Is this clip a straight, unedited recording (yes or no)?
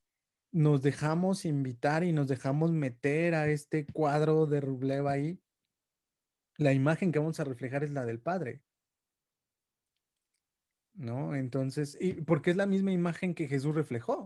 yes